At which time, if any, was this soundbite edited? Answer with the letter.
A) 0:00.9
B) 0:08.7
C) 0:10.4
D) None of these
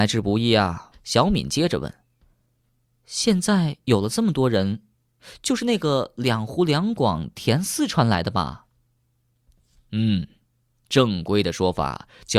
A